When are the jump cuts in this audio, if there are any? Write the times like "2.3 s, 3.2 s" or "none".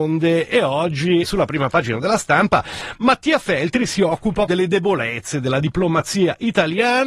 1.2 s, 4.5 s